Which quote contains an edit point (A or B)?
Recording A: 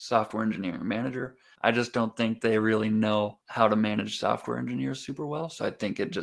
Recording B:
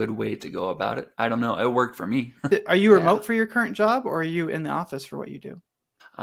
A